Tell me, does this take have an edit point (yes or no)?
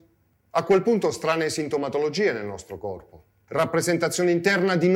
yes